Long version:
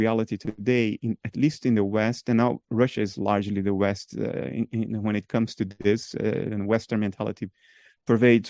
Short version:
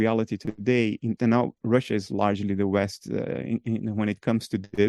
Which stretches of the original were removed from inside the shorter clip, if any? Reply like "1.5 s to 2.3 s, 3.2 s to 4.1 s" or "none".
1.2 s to 2.2 s